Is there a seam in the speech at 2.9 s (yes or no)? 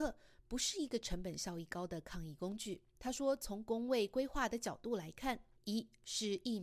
no